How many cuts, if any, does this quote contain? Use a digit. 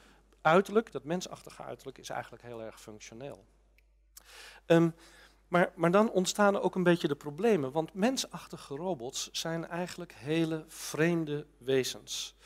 1